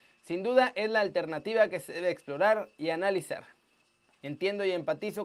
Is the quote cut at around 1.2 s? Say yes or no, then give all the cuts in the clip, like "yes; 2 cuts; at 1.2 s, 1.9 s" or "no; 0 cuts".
no; 1 cut; at 4.1 s